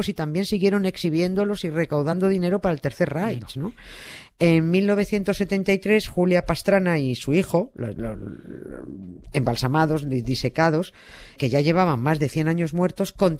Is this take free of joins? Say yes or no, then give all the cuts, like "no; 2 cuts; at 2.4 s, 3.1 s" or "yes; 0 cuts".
no; 1 cut; at 11.4 s